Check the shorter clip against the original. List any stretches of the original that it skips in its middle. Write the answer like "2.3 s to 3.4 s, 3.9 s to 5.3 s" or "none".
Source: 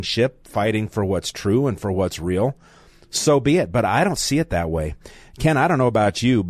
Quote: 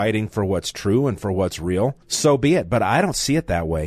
2.6 s to 3.0 s